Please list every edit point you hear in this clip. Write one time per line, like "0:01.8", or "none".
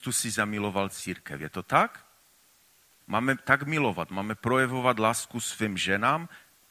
none